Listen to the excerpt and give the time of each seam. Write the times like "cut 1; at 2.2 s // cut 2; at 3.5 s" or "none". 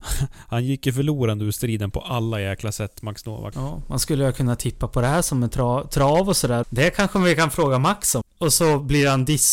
cut 1; at 3.5 s // cut 2; at 6.6 s // cut 3; at 8.2 s

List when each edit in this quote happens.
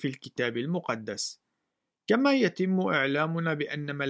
none

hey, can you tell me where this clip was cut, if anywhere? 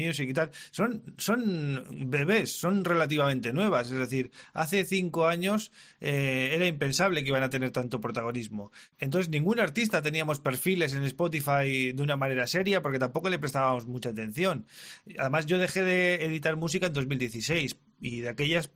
none

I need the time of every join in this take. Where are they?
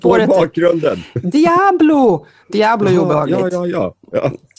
none

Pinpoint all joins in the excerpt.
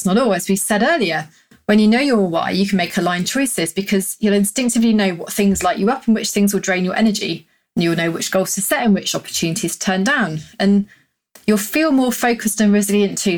none

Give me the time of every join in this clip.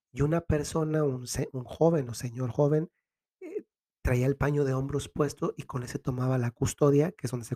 none

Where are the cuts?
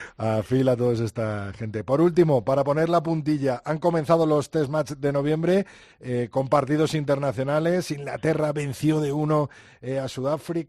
none

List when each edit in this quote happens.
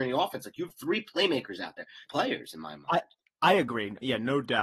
cut 1; at 2.1 s

